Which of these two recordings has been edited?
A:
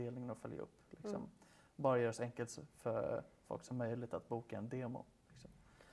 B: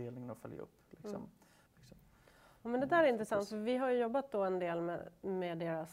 B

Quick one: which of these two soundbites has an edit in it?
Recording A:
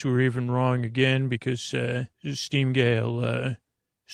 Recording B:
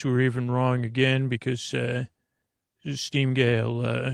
A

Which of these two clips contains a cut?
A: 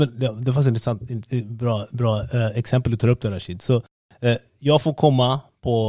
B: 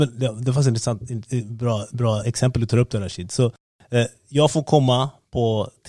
B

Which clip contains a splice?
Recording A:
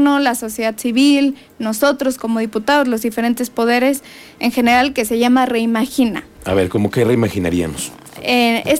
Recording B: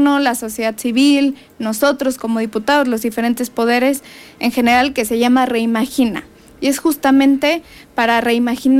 A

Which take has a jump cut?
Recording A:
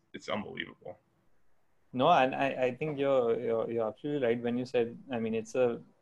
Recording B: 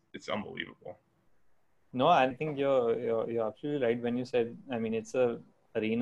B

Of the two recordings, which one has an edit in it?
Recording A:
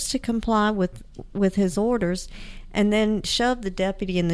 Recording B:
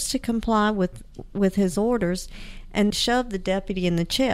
B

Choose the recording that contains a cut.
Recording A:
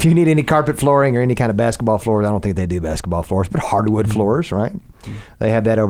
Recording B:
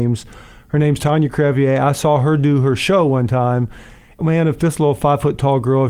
B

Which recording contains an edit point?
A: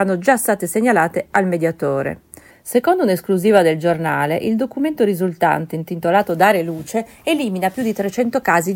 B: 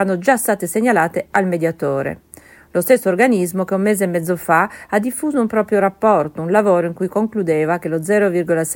A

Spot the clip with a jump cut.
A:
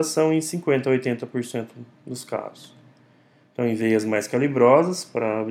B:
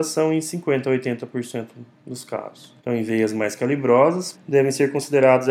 B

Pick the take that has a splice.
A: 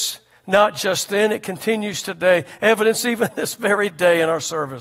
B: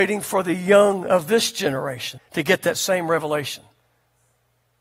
B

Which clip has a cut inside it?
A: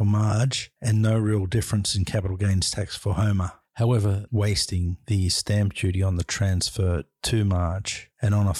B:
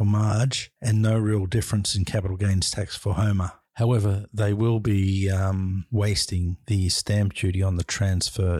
A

